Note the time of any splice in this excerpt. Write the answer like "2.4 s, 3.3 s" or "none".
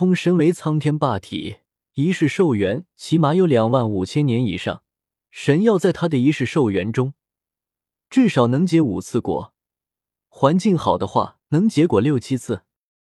1.8 s, 5.2 s, 11.4 s